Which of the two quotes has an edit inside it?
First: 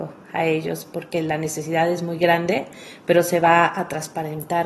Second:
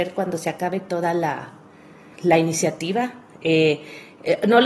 second; 1 cut; at 2.1 s

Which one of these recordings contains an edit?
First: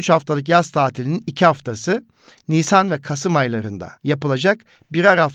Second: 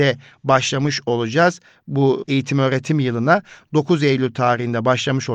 first; 1 cut; at 4.0 s

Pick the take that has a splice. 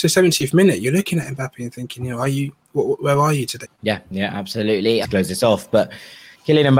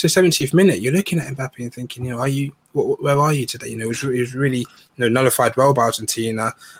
first; 2 cuts; at 3.6 s, 5.0 s

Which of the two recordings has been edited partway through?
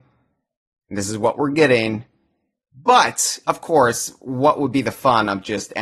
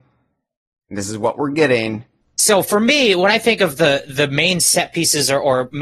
second; 1 cut; at 2.2 s

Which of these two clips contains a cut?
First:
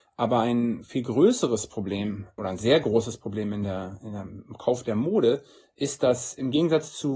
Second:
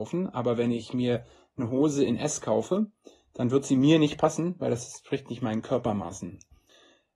first; 1 cut; at 2.4 s

